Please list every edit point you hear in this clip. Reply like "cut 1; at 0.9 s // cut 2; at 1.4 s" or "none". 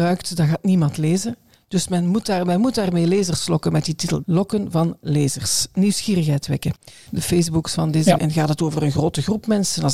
cut 1; at 4.2 s // cut 2; at 7.1 s // cut 3; at 8.2 s